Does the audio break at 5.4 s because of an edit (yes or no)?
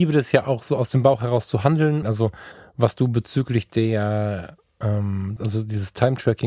yes